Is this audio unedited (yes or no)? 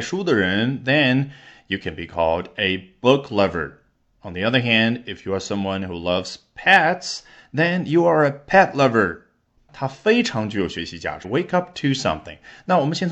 no